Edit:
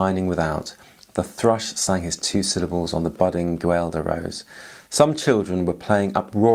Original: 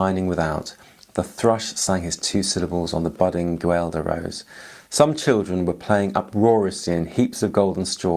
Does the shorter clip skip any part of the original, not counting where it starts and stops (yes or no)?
no